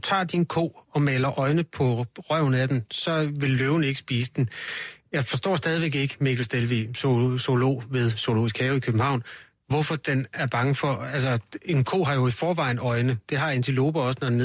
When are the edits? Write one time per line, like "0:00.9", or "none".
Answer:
none